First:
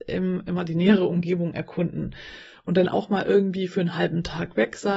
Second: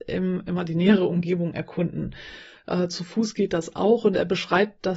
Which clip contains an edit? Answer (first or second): second